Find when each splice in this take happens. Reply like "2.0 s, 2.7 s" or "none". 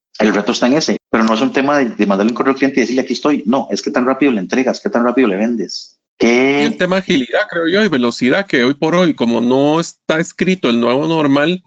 1.0 s, 6.1 s